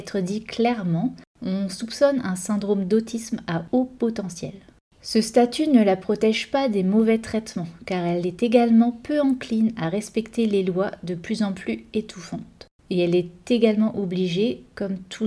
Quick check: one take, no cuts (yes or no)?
yes